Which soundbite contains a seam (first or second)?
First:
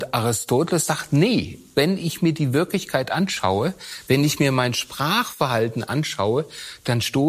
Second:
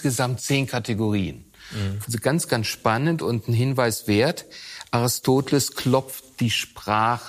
second